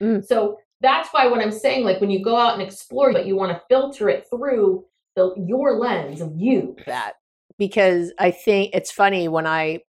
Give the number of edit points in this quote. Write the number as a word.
two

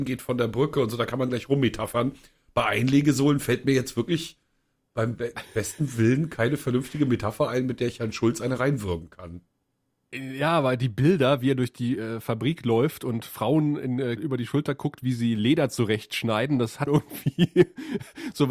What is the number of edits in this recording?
two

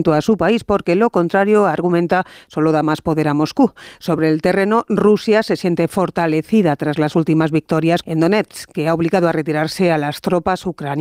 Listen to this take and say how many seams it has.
one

